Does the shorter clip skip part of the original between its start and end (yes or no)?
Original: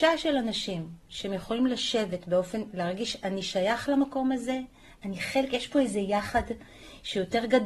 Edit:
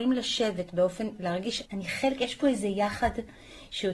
yes